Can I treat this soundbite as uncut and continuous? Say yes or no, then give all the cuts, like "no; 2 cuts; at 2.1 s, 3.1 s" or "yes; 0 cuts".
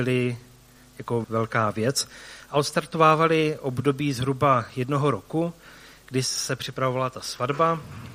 no; 1 cut; at 1.2 s